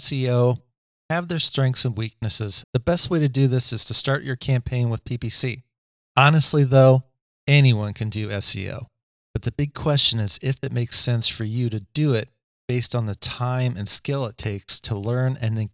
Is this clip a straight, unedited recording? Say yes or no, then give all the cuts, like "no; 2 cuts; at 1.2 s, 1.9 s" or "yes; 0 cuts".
no; 2 cuts; at 2.6 s, 6.1 s